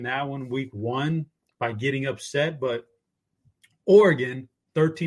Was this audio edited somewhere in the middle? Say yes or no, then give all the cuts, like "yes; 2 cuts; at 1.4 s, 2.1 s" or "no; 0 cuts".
no; 0 cuts